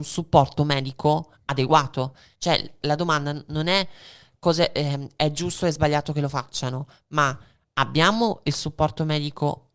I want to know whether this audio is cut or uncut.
cut